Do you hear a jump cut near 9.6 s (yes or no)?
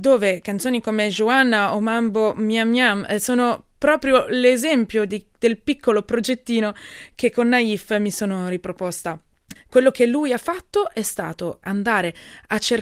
yes